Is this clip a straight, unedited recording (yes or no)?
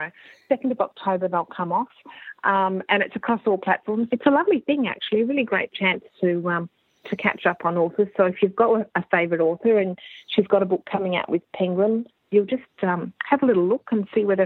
no